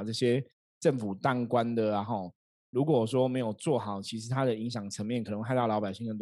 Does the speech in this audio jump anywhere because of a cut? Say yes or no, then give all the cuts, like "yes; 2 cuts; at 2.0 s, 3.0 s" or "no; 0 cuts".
no; 0 cuts